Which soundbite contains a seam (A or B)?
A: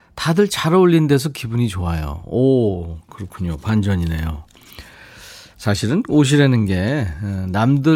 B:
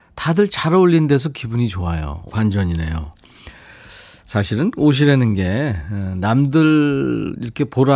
B